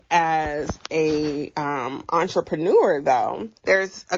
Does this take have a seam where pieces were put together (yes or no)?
no